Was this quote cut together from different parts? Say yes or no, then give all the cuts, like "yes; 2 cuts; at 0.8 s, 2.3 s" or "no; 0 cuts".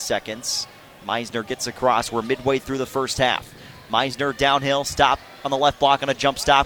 no; 0 cuts